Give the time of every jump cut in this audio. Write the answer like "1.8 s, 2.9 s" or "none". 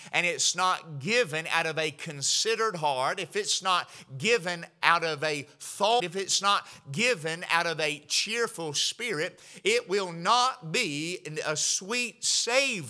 6.0 s